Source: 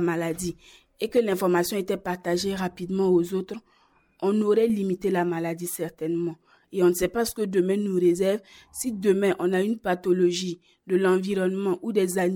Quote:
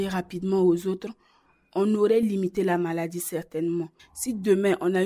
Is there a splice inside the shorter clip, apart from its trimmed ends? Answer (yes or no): yes